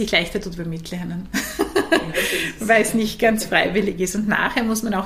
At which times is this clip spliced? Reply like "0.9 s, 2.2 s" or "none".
none